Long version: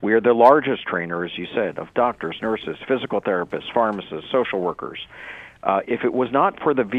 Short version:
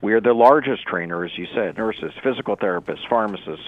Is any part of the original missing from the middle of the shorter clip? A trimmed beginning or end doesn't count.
yes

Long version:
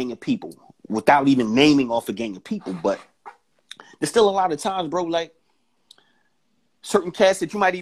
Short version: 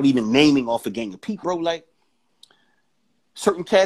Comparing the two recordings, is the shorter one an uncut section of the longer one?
no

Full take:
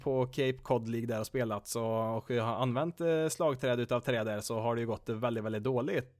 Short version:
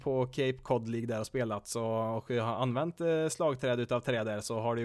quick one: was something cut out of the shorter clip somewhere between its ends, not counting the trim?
no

